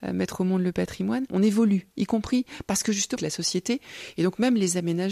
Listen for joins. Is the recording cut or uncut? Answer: cut